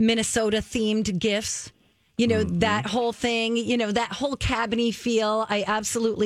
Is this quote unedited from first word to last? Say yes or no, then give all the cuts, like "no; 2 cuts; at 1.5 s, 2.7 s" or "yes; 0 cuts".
yes; 0 cuts